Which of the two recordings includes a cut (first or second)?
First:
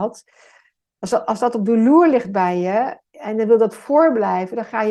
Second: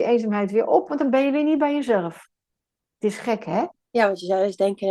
second